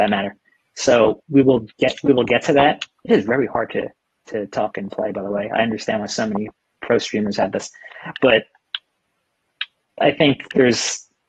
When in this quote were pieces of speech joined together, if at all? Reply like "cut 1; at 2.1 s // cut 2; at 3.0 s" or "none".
cut 1; at 10.0 s